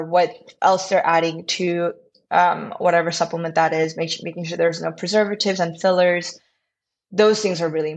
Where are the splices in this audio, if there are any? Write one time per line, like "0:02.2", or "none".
none